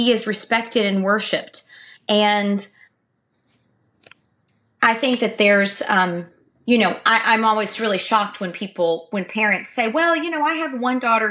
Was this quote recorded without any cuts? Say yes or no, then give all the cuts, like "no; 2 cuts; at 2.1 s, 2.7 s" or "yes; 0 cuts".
no; 1 cut; at 1.9 s